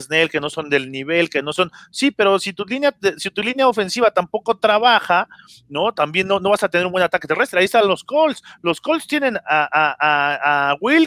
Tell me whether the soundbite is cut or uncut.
uncut